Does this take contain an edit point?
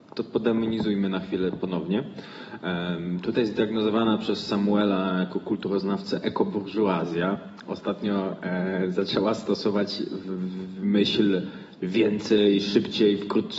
no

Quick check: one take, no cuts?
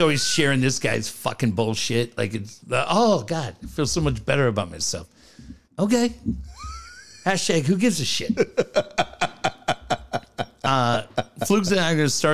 no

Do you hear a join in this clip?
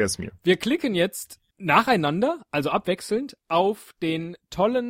yes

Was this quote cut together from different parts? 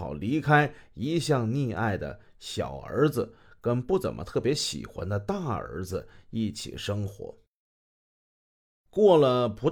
no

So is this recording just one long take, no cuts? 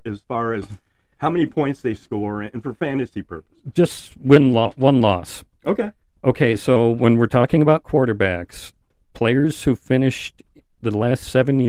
yes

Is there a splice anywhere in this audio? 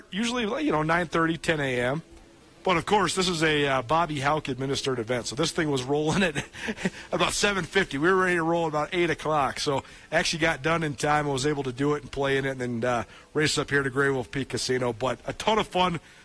no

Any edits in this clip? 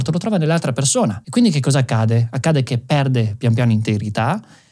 no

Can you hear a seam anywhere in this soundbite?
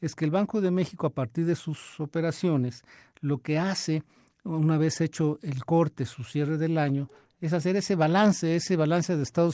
no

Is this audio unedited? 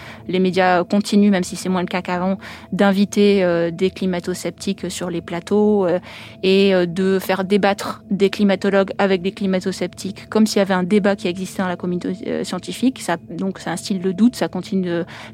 yes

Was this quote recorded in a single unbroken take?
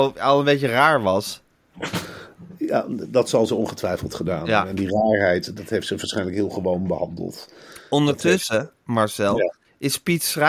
yes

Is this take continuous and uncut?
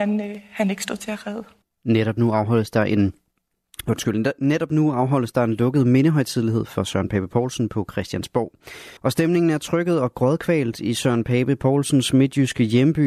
no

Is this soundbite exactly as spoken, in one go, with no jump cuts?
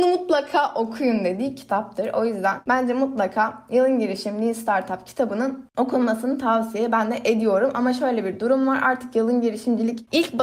yes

